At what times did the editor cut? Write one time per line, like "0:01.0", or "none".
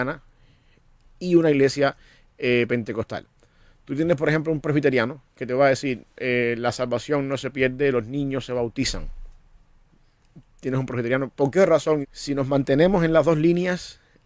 0:12.0